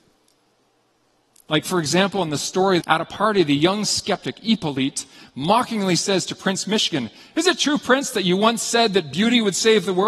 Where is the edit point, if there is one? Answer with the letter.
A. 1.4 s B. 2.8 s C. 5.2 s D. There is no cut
B